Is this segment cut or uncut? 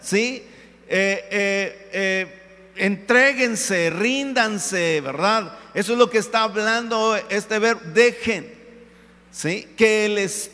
uncut